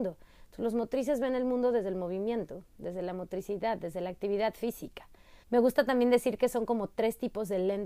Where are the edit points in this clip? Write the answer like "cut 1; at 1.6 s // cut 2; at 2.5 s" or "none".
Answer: cut 1; at 5.4 s